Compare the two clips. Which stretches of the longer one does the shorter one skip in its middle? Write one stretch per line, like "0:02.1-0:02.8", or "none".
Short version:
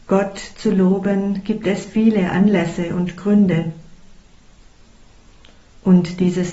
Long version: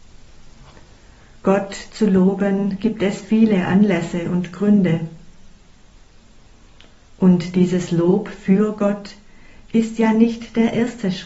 none

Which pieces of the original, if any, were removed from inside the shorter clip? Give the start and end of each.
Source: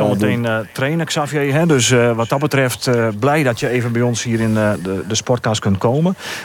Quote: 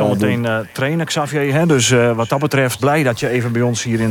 0:02.8-0:03.2

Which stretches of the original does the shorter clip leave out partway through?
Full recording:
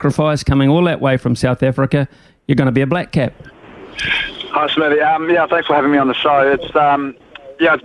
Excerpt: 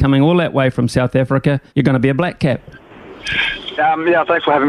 0:02.2-0:02.4
0:04.5-0:05.0

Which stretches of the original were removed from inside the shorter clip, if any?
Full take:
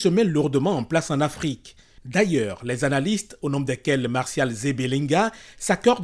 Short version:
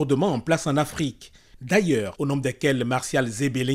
0:02.6-0:03.4

